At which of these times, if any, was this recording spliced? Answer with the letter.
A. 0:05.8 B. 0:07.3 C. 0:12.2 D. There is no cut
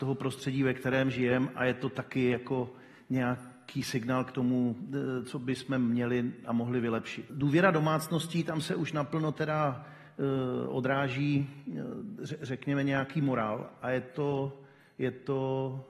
B